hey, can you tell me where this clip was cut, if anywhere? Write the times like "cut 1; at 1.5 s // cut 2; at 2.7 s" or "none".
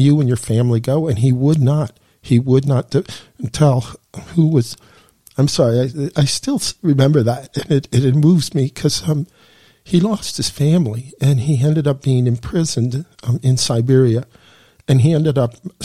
none